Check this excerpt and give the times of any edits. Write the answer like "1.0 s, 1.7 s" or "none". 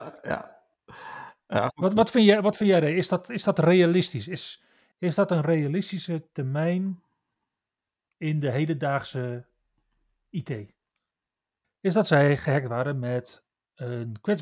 4.9 s, 11.6 s

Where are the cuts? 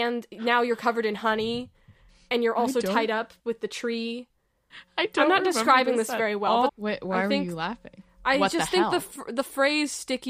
6.7 s

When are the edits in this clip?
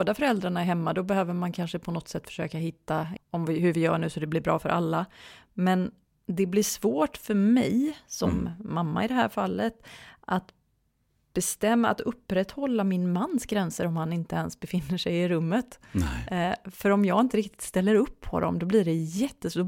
3.2 s

